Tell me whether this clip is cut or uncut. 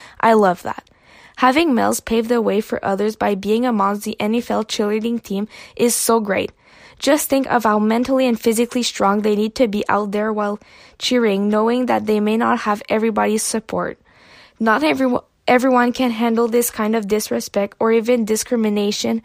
uncut